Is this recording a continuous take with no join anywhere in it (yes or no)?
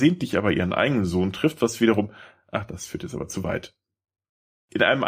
yes